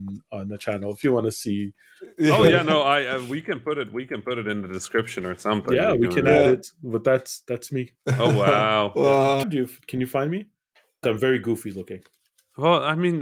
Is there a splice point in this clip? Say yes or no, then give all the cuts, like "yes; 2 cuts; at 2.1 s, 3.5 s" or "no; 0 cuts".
yes; 3 cuts; at 8.0 s, 9.4 s, 11.0 s